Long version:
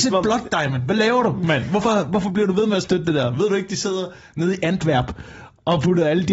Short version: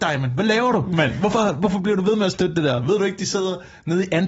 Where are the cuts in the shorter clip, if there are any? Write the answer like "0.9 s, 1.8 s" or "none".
none